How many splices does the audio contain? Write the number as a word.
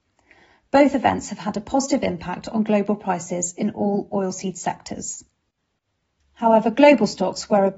one